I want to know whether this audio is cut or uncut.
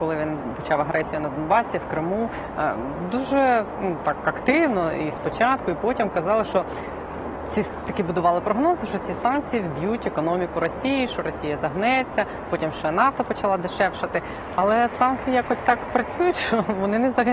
uncut